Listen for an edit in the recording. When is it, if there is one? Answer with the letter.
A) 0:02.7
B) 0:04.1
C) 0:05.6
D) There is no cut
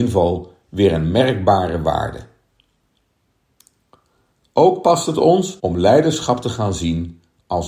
C